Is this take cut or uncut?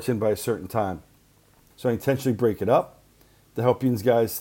cut